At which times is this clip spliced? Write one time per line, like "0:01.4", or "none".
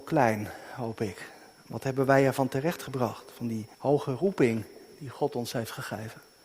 0:01.5
0:03.7